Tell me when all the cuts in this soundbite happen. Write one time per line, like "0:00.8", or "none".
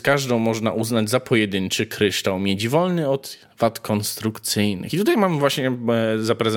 none